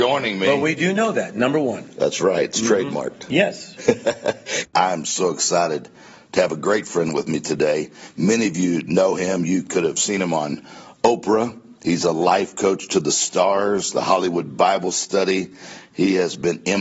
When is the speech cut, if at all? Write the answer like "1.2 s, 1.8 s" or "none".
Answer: 4.7 s